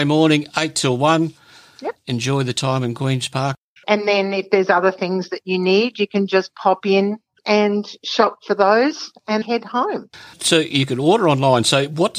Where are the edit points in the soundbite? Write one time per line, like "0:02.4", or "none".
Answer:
0:02.0
0:03.8
0:09.4

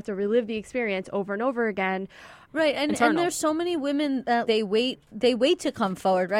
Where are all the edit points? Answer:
0:02.5
0:04.5

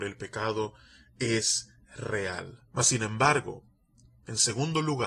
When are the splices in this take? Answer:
0:02.7

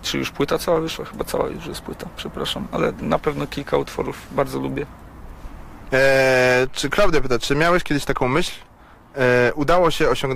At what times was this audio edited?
0:05.9

